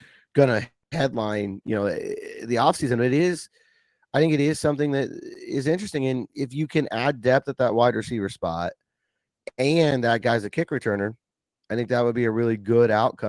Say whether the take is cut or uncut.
uncut